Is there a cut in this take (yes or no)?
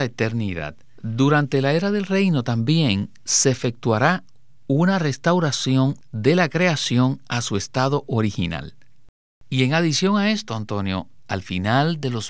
yes